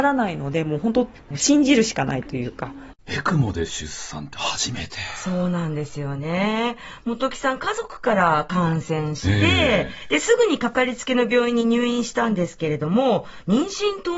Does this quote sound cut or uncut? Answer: cut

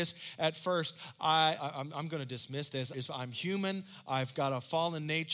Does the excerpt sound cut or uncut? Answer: cut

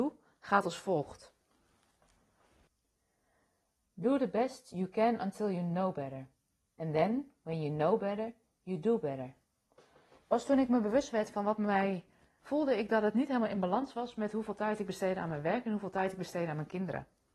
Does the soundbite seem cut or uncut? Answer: cut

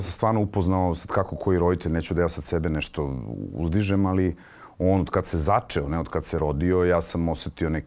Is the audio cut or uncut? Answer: uncut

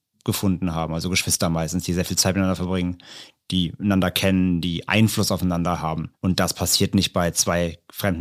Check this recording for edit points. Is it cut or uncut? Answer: cut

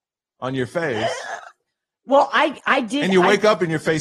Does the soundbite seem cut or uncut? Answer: uncut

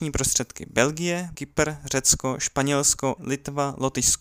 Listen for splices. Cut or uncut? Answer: cut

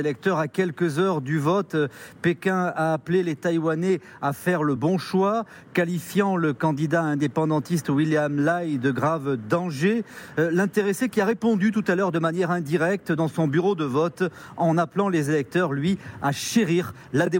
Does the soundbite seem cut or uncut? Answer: uncut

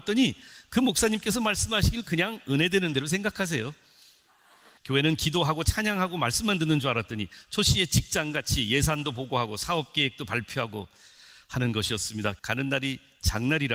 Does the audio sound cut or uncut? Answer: cut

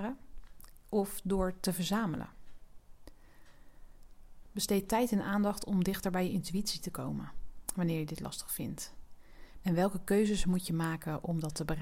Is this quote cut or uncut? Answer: cut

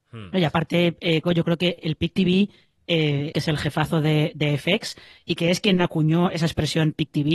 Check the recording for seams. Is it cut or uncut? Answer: cut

